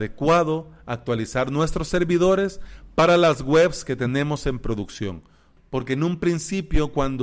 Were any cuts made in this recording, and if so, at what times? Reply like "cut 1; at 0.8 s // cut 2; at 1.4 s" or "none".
cut 1; at 5.6 s